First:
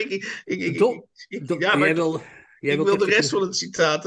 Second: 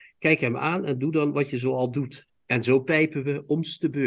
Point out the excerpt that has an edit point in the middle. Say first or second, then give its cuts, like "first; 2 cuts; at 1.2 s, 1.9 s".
second; 1 cut; at 2.3 s